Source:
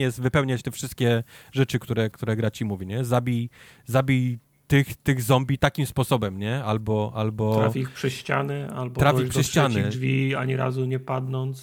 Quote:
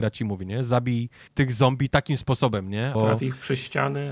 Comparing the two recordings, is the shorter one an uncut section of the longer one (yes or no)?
no